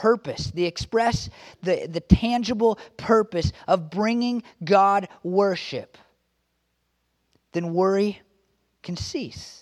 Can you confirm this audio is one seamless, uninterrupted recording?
yes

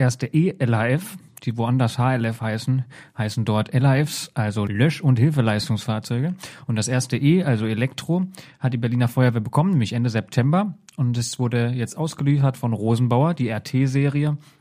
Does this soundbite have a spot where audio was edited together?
no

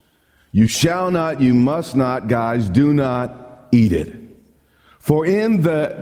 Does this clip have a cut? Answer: no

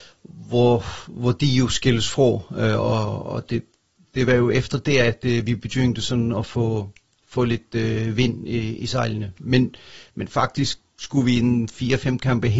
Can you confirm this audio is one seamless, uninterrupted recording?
yes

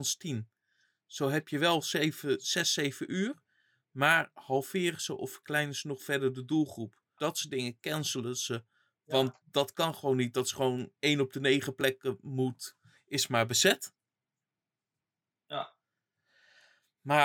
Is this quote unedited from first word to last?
no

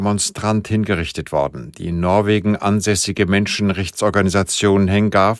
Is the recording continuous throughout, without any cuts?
yes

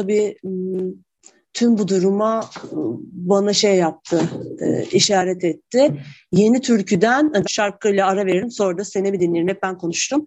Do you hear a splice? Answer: yes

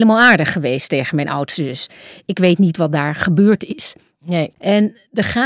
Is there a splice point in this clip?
yes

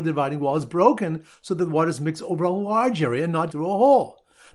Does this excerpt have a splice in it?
yes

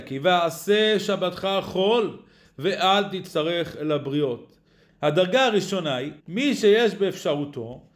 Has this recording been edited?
yes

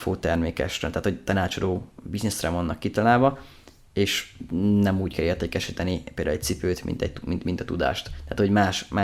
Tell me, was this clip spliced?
no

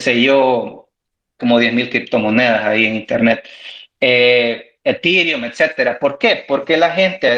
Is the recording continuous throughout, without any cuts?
no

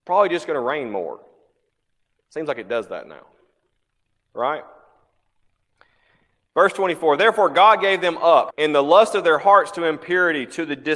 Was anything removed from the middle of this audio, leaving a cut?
yes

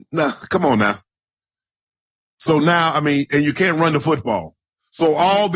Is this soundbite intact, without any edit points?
yes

